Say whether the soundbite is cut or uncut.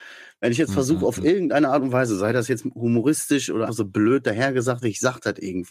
cut